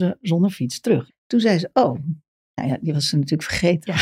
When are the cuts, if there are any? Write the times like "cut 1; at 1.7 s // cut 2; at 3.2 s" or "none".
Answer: cut 1; at 1.1 s